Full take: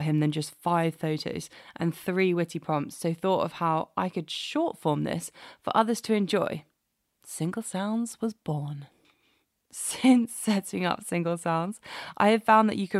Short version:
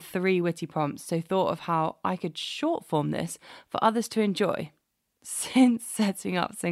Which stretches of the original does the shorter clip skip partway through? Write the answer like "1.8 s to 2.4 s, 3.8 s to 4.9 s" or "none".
7.0 s to 9.5 s